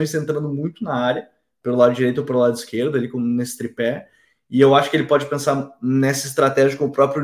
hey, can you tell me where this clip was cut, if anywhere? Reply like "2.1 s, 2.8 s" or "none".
none